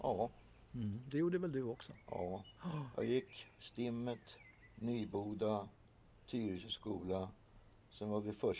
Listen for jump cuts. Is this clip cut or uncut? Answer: uncut